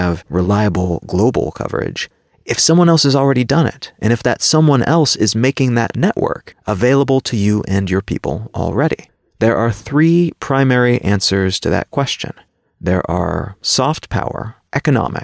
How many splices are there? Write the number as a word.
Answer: zero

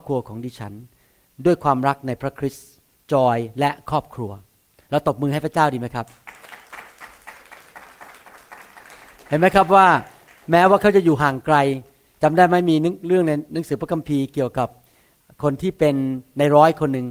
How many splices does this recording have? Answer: zero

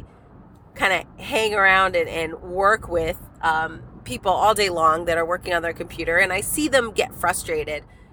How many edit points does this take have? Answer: zero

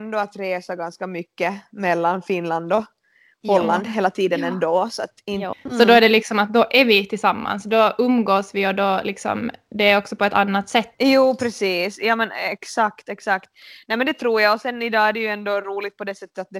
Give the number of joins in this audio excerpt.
one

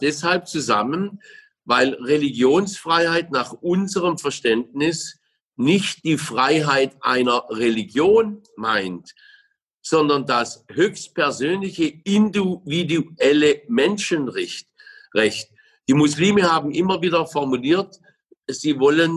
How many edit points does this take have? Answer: zero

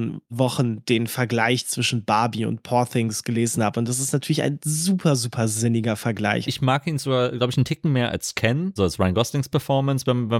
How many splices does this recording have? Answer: two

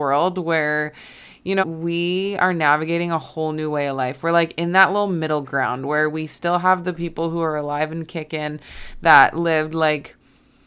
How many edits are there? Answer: one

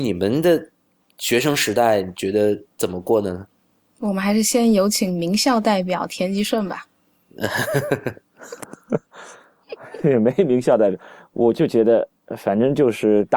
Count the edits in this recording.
zero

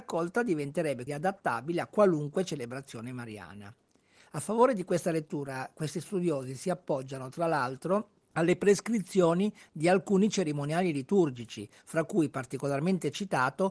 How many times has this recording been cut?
one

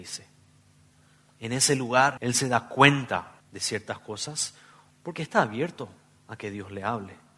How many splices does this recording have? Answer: two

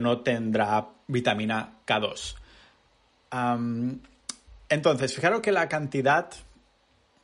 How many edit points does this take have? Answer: zero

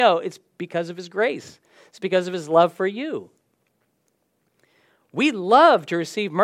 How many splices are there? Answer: zero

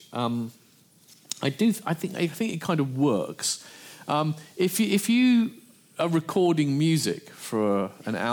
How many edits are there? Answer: zero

